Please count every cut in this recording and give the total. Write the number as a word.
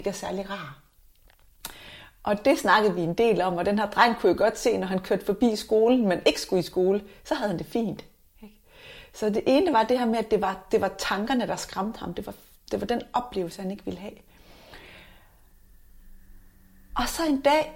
zero